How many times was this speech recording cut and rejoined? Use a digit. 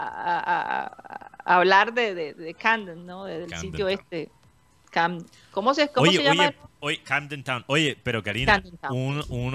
0